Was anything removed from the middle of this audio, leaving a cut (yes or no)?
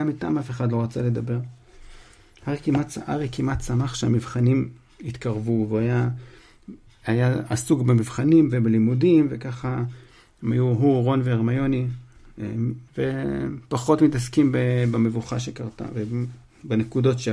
yes